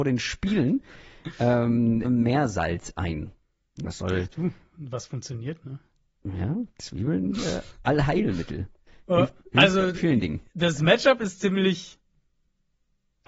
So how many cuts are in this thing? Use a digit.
2